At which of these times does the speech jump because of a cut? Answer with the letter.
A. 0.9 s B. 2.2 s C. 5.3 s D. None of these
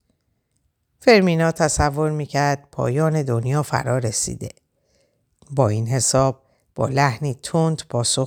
D